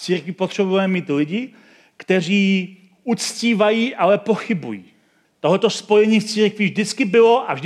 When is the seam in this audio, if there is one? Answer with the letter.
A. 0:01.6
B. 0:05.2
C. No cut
B